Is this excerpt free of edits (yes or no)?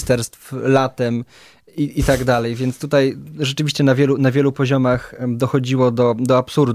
yes